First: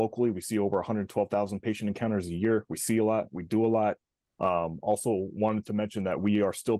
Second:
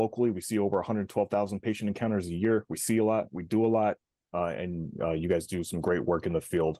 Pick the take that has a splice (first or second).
first